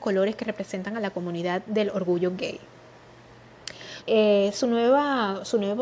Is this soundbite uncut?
no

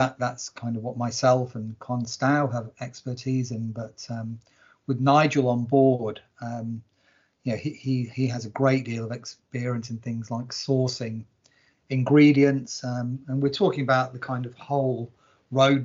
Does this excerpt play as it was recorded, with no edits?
yes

